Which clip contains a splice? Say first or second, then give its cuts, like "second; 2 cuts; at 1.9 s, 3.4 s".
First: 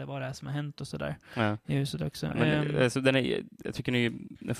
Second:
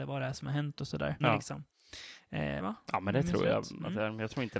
second; 2 cuts; at 1.2 s, 2.6 s